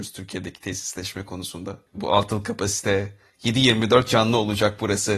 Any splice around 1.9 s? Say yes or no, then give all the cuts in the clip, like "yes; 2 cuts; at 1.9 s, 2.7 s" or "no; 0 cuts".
yes; 1 cut; at 1.9 s